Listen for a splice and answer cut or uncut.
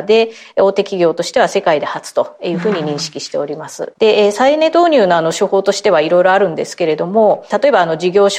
cut